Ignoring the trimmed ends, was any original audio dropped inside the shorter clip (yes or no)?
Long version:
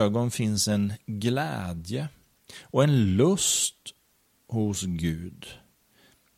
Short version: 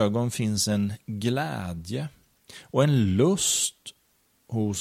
no